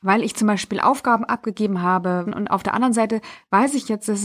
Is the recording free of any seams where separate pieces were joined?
no; 1 cut; at 2.3 s

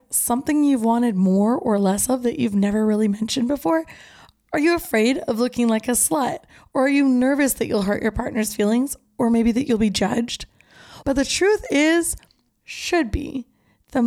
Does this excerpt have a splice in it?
yes; 2 cuts; at 11.0 s, 12.5 s

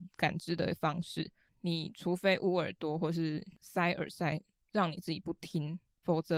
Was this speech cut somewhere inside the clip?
no; 0 cuts

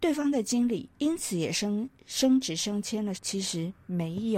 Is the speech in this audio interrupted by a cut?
yes; 2 cuts; at 0.9 s, 3.1 s

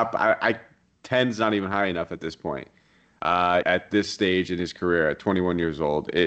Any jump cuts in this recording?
yes; 1 cut; at 3.6 s

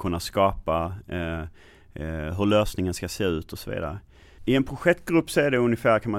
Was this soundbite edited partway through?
yes; 1 cut; at 4.4 s

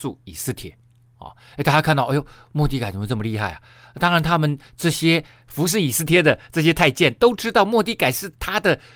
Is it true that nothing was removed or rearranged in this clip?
yes; 0 cuts

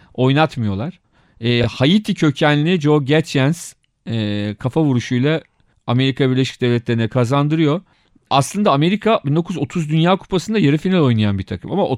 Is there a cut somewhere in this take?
no; 0 cuts

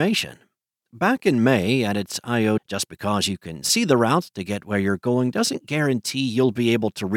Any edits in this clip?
yes; 1 cut; at 2.6 s

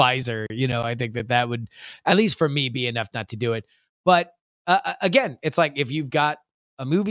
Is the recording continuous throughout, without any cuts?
yes; 0 cuts

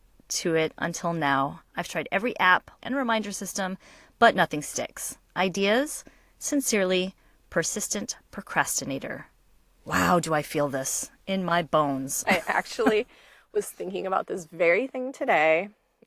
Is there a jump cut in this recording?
yes; 1 cut; at 2.8 s

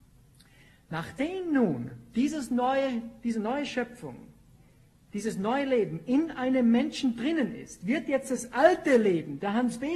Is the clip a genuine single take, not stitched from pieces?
yes; 0 cuts

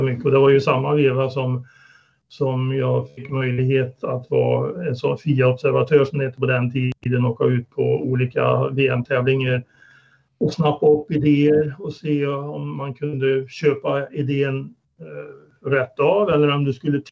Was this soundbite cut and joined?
no; 0 cuts

